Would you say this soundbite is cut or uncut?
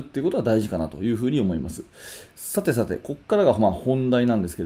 uncut